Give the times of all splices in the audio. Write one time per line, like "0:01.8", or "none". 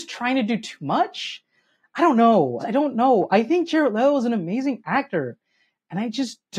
0:02.6